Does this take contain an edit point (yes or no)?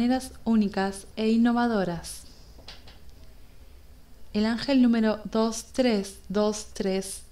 no